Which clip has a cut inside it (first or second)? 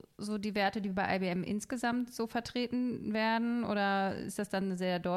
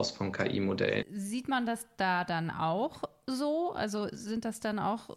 second